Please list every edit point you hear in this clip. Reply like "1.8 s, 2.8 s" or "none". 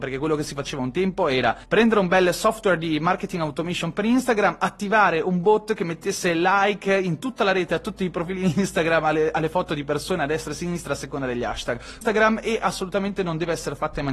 12.0 s